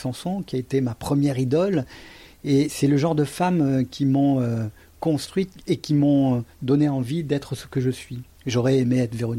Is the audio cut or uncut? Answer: uncut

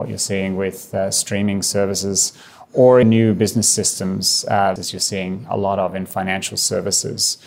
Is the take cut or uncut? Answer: cut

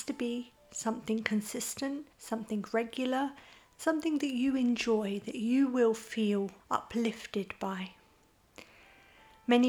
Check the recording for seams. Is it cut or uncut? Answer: cut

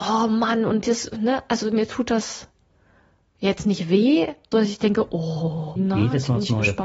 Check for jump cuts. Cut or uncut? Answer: cut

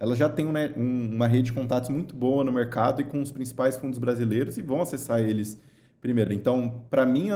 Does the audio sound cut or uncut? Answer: uncut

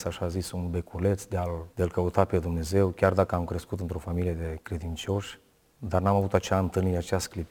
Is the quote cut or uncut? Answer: cut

